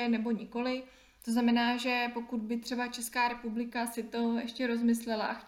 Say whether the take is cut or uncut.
cut